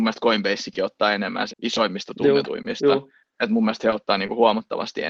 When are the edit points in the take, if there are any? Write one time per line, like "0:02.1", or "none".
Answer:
0:01.5